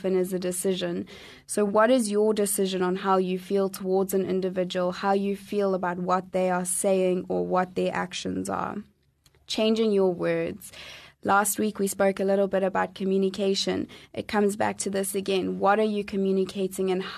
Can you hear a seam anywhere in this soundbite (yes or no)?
no